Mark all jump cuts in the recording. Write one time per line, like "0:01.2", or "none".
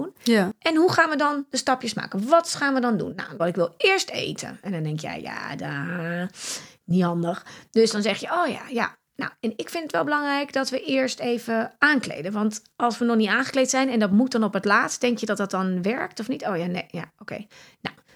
0:03.4

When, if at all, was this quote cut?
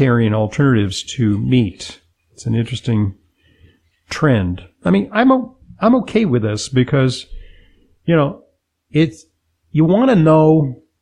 none

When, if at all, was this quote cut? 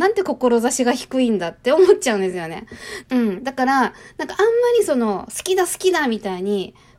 0:03.0

